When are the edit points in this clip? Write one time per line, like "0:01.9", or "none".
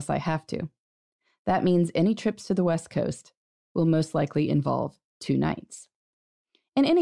none

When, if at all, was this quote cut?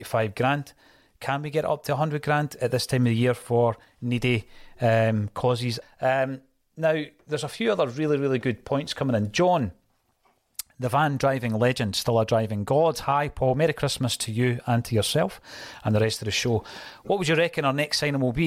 0:05.8

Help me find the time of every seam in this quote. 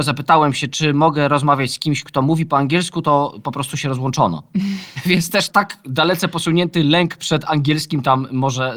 0:05.5

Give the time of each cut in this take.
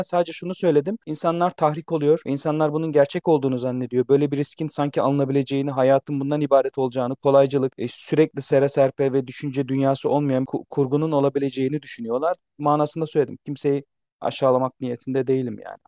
0:07.7

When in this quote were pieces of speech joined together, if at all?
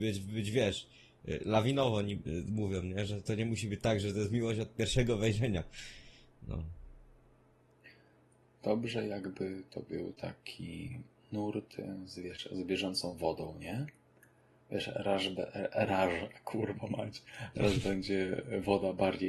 none

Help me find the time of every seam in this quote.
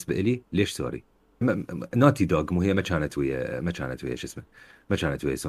0:01.4

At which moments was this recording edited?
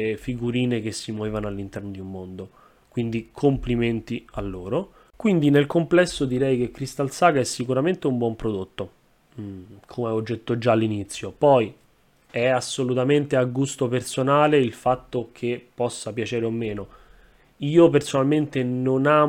none

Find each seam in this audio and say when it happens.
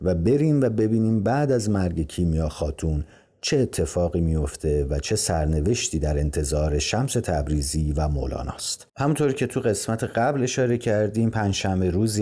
0:08.9

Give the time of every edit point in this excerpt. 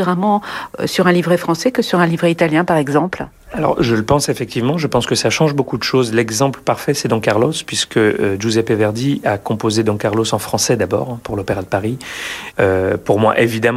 0:12.5

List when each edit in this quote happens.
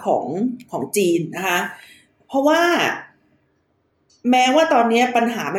none

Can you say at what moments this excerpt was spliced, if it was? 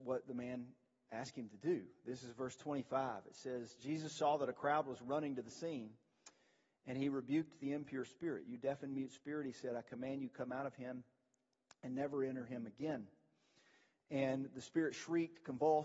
none

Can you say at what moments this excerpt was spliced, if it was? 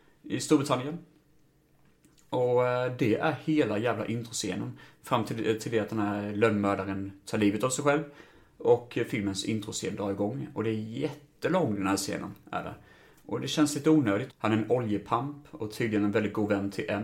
0:14.3

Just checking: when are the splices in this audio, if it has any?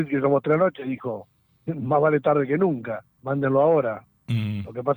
0:01.7
0:03.1

